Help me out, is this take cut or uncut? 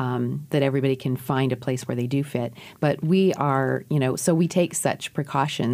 uncut